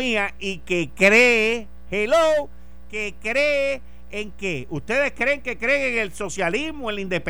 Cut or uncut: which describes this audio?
uncut